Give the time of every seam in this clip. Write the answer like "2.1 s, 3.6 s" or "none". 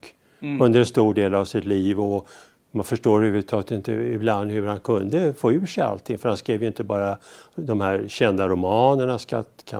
none